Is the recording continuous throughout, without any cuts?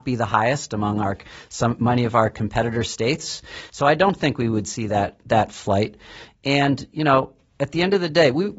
yes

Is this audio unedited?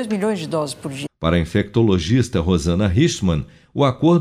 no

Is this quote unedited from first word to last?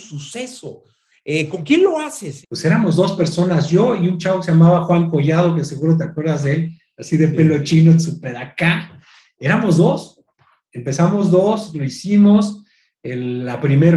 no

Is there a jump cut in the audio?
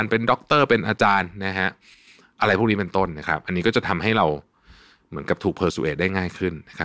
no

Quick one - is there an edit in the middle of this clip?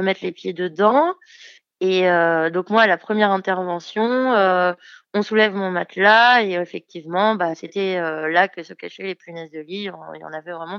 no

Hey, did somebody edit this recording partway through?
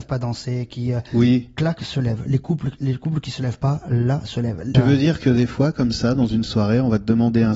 yes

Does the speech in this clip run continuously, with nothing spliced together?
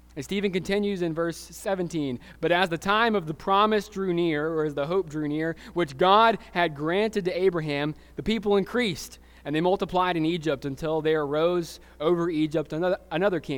yes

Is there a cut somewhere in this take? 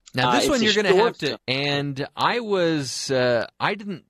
yes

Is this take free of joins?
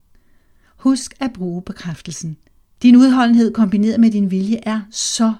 no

